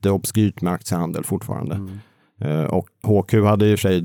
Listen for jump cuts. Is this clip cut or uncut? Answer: cut